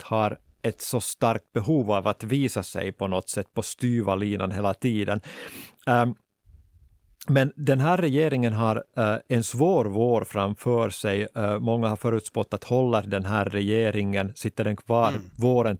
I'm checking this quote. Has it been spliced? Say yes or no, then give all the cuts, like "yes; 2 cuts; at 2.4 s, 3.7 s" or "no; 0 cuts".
no; 0 cuts